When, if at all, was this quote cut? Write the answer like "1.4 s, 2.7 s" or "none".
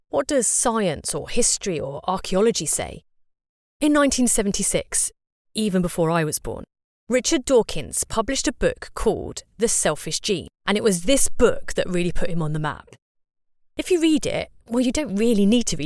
10.5 s, 14.6 s

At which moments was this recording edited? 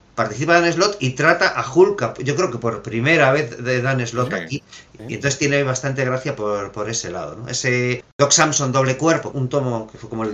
8.0 s, 9.3 s

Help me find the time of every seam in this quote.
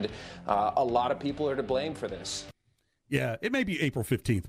none

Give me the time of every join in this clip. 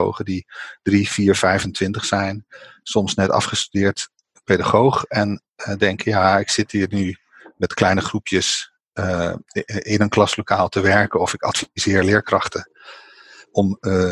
none

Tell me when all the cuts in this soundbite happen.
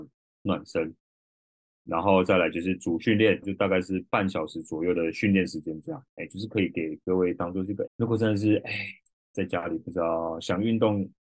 3.4 s, 6.1 s, 7.9 s

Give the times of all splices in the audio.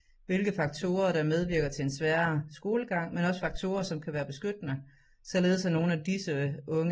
none

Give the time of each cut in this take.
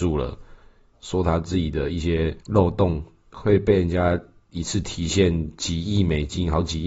0.9 s, 2.4 s

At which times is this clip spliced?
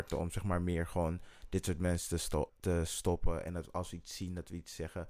2.5 s

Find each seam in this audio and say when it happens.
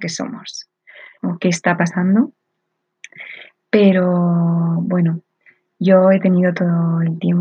1.2 s

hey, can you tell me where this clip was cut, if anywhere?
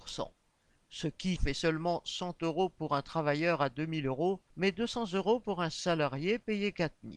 1.4 s, 4.5 s

